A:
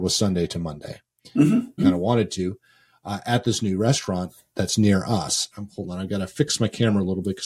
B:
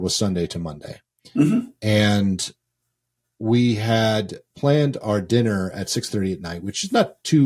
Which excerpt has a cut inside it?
A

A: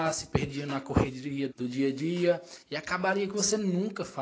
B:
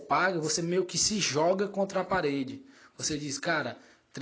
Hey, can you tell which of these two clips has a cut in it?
A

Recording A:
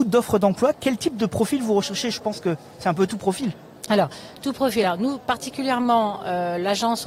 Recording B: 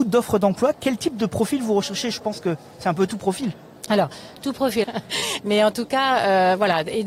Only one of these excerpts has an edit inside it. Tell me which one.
B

